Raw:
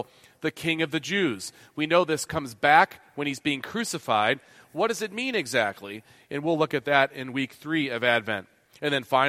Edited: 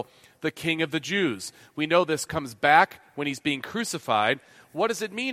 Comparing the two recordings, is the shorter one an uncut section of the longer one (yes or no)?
yes